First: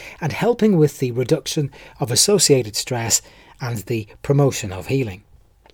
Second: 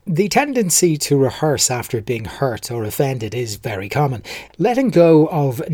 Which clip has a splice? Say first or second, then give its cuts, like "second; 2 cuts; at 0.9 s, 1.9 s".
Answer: second; 1 cut; at 4.5 s